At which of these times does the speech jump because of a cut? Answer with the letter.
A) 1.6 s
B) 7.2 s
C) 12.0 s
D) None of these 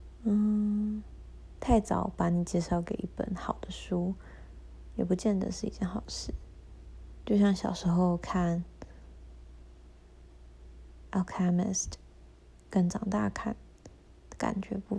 D